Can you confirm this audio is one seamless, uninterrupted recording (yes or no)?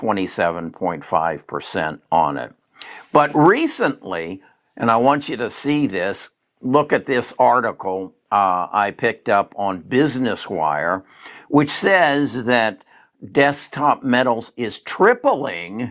yes